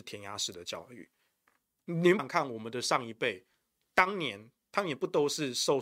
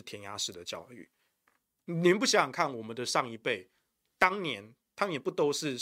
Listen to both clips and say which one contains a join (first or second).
first